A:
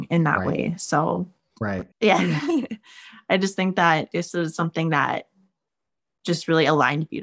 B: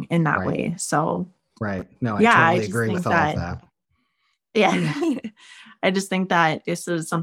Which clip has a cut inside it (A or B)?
A